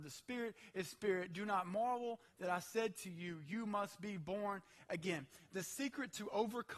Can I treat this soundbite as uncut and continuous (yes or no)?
yes